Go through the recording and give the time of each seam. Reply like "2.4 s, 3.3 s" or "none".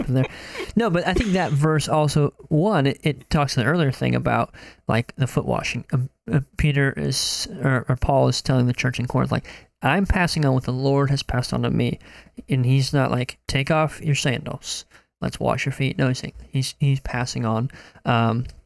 13.4 s

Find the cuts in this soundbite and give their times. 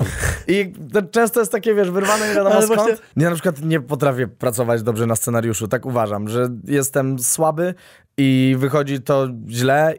3.1 s

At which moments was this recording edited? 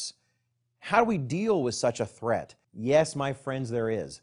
2.6 s

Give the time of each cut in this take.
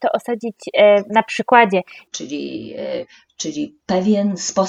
2.1 s

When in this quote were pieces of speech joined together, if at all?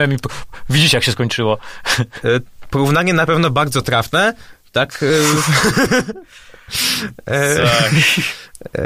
none

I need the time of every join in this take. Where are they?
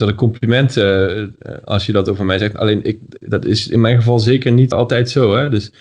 4.7 s

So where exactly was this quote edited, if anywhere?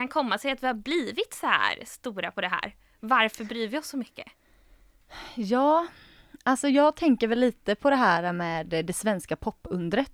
none

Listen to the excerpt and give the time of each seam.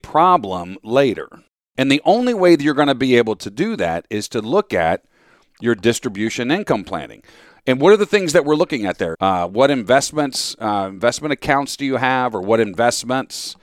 9.1 s

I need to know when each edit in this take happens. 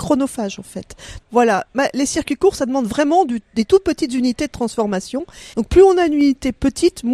1.2 s, 5.5 s

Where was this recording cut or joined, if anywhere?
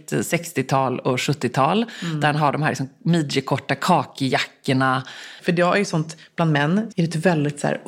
5.4 s, 6.9 s

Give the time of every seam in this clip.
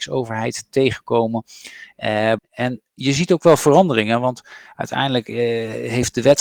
2.4 s

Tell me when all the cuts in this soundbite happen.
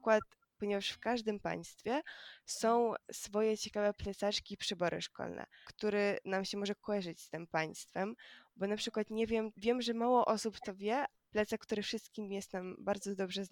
5.6 s, 9.5 s, 11.2 s

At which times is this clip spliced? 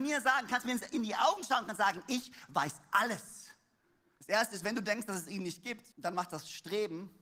4.2 s, 5.9 s

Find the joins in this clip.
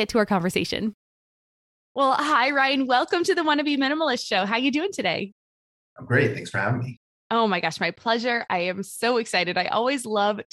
none

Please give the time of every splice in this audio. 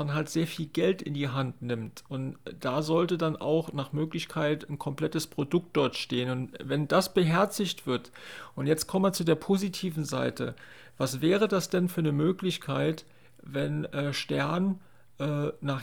none

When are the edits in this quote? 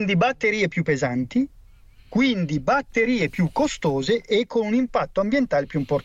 none

